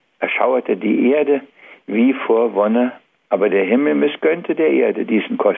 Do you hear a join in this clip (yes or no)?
no